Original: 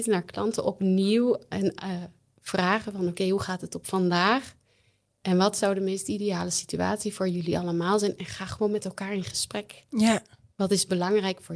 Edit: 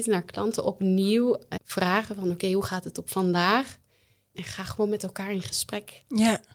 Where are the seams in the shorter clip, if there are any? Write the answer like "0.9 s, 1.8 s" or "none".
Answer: 1.6 s, 4.3 s